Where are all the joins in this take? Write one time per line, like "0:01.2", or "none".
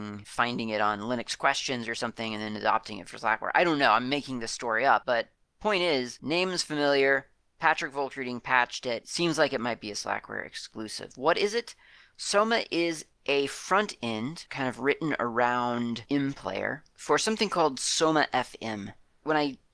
none